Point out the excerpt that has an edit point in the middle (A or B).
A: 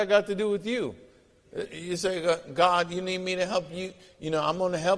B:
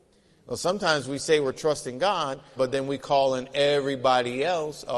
B